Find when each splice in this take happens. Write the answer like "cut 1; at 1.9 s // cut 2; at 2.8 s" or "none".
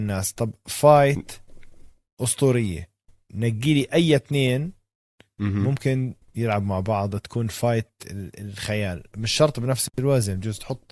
cut 1; at 6.2 s